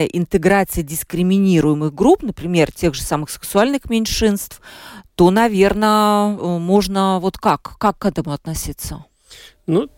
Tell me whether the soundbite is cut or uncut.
uncut